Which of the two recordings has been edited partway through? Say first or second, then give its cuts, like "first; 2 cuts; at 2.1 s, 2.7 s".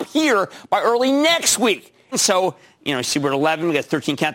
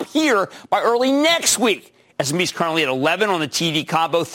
first; 1 cut; at 2.1 s